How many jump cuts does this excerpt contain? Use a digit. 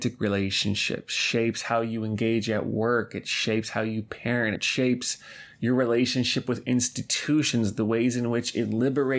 1